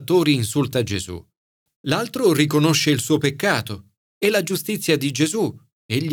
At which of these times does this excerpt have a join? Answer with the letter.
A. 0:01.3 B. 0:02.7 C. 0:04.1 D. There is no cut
C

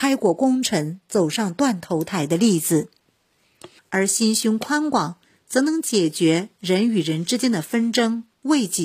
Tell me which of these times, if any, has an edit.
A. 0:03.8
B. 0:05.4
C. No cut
A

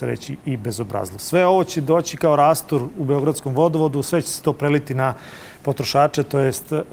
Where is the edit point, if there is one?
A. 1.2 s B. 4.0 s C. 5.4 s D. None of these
A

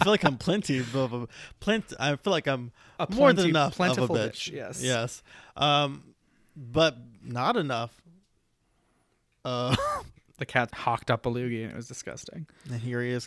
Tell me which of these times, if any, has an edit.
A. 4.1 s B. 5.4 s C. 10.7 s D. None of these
C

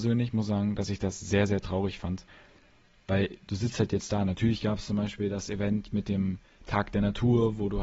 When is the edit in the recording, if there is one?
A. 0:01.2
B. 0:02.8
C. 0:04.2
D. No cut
D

